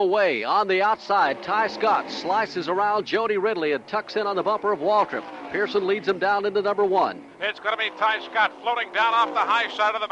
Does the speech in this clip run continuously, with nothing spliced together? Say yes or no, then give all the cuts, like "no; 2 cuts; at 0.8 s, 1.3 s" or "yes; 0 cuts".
yes; 0 cuts